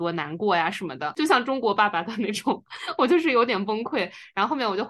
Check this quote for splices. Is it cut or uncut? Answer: cut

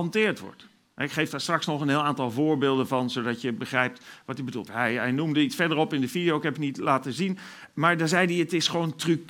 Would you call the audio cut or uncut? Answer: cut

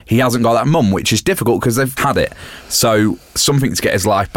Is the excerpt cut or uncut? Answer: cut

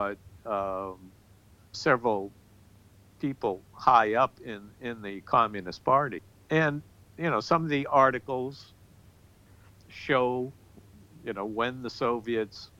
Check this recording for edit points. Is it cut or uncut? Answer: cut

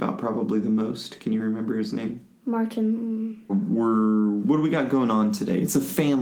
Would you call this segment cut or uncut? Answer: cut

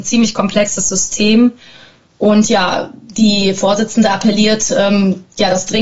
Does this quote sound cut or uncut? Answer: uncut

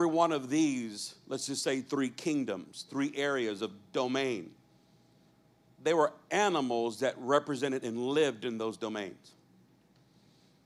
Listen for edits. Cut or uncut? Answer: uncut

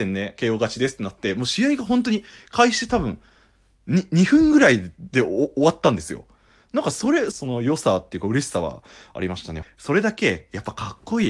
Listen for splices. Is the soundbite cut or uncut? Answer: cut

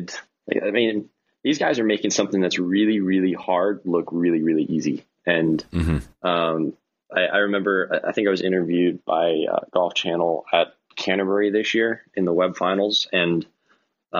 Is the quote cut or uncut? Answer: uncut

